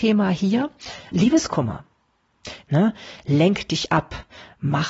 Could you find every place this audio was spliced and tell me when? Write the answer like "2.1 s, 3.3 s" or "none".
1.1 s, 2.6 s

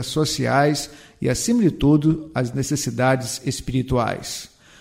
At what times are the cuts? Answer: none

